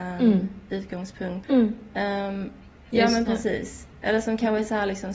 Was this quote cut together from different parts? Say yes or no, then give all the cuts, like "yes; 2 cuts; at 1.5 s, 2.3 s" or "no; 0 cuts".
yes; 2 cuts; at 1.4 s, 2.9 s